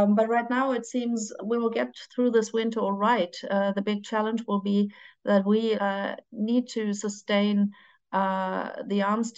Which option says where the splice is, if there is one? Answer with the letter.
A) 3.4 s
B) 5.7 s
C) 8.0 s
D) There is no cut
B